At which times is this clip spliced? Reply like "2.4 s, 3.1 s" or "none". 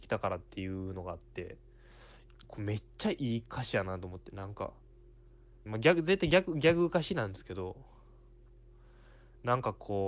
5.7 s